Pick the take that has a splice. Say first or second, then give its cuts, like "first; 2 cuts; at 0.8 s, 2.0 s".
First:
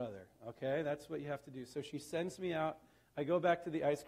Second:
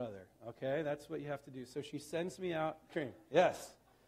second; 1 cut; at 2.9 s